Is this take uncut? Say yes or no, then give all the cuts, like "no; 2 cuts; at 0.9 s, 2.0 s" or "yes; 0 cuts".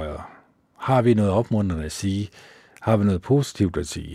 yes; 0 cuts